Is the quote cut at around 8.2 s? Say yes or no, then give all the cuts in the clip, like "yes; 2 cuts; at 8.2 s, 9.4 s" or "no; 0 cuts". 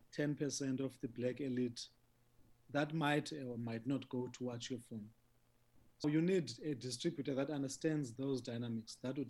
yes; 2 cuts; at 6.0 s, 8.2 s